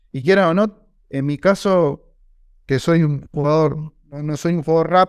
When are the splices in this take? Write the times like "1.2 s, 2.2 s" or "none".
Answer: none